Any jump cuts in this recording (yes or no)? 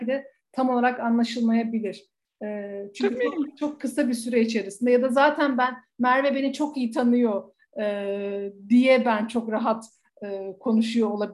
no